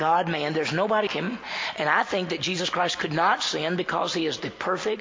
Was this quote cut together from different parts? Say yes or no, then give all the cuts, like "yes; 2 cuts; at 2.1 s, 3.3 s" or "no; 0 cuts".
yes; 1 cut; at 1.1 s